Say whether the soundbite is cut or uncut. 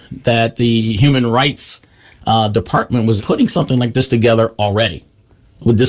cut